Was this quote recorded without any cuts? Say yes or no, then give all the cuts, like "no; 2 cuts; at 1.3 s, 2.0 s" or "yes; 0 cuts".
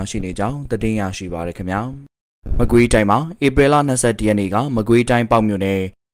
yes; 0 cuts